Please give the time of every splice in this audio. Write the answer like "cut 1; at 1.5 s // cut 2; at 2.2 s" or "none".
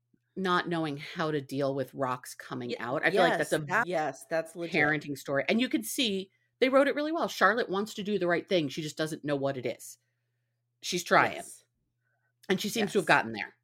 cut 1; at 3.8 s